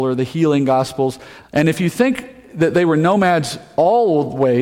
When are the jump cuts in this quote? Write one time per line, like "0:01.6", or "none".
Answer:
0:01.4